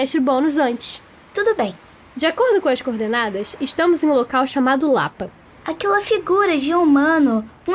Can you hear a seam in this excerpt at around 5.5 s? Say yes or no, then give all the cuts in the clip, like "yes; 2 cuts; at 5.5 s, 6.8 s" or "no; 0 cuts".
yes; 1 cut; at 5.5 s